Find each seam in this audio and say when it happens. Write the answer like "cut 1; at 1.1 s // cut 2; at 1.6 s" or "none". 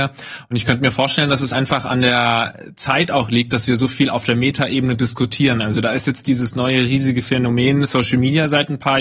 none